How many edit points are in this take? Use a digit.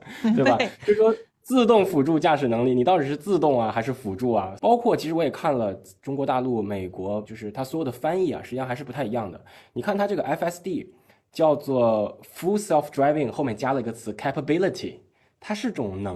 2